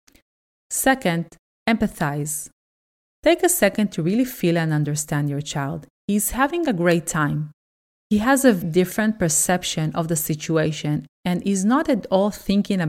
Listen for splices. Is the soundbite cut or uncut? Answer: cut